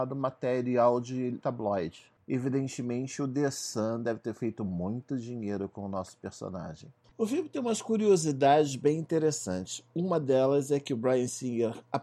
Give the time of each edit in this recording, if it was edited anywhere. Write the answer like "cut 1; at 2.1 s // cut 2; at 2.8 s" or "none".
cut 1; at 7.1 s